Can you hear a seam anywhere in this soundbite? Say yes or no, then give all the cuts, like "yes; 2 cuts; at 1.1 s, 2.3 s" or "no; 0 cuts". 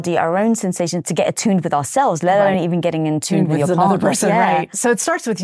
no; 0 cuts